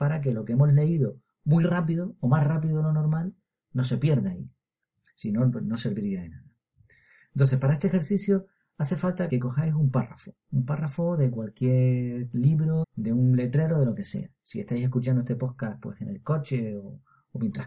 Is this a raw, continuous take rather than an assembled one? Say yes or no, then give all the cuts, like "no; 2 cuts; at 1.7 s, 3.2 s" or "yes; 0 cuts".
no; 2 cuts; at 9.3 s, 12.8 s